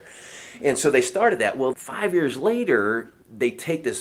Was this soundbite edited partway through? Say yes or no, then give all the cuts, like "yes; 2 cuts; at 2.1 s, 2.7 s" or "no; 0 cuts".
yes; 1 cut; at 1.7 s